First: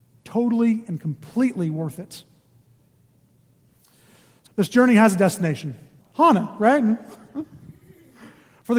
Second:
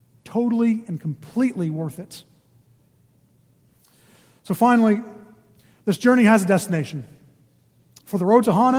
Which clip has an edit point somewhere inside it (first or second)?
first